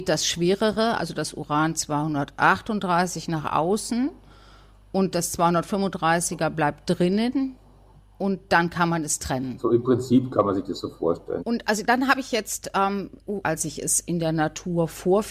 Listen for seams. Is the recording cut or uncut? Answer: cut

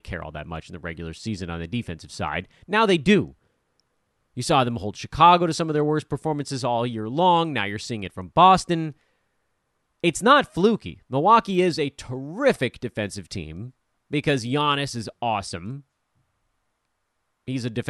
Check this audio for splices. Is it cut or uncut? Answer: uncut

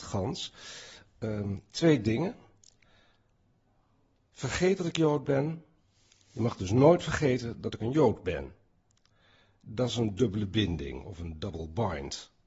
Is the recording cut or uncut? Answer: uncut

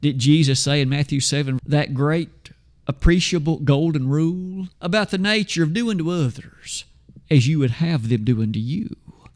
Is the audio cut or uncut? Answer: cut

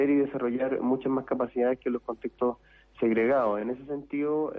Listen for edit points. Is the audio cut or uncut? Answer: uncut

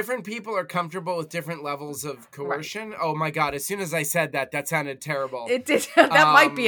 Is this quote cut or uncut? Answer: uncut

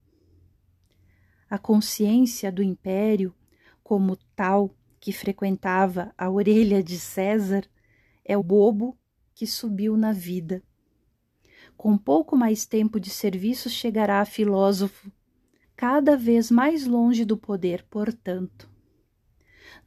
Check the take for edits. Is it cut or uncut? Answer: cut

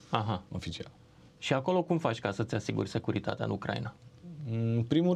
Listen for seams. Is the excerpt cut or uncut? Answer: uncut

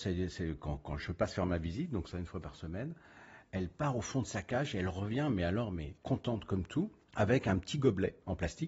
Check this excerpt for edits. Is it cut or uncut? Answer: cut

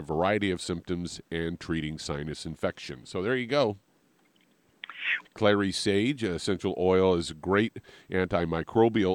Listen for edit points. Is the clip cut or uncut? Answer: cut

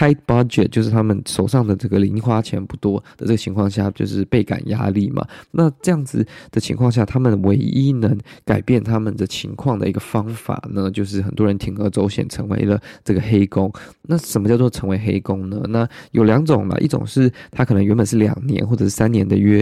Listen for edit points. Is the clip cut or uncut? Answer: uncut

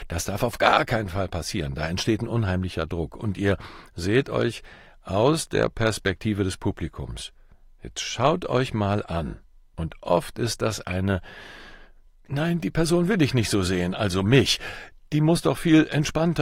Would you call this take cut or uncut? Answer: cut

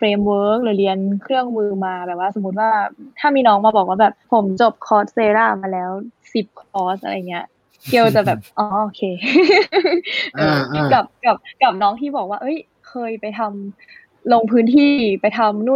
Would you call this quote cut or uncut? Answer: cut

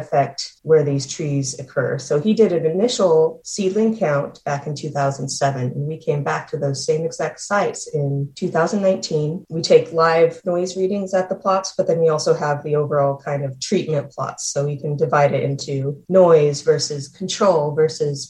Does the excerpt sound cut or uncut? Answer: uncut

